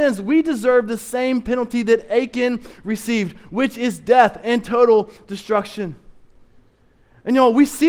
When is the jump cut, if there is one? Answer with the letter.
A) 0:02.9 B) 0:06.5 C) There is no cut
C